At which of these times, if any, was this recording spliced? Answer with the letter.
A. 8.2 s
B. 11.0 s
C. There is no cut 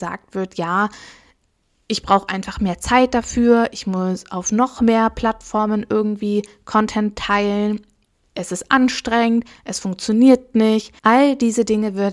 B